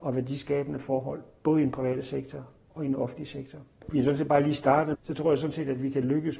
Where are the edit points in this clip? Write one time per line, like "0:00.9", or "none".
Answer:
0:03.8
0:04.9